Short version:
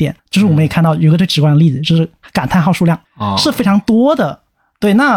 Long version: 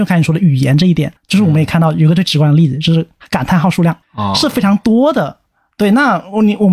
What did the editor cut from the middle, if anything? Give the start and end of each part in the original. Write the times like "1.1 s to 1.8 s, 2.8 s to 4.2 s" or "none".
none